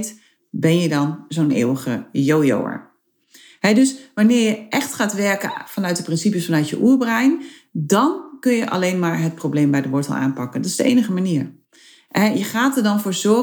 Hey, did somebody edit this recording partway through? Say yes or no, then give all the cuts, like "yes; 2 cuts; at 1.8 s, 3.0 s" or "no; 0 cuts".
no; 0 cuts